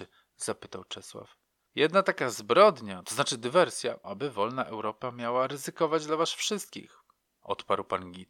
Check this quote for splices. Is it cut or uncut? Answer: cut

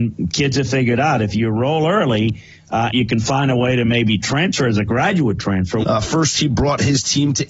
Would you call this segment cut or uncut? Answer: cut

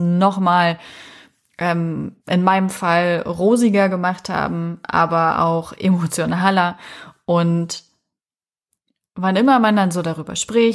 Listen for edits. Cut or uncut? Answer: cut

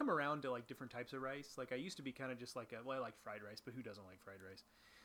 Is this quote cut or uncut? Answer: uncut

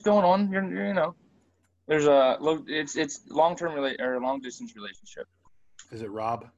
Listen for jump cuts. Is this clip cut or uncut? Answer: uncut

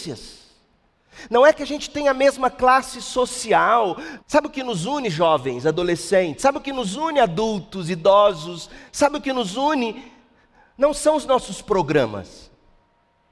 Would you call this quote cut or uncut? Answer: cut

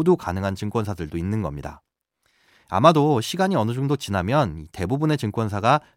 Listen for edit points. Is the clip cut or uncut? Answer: uncut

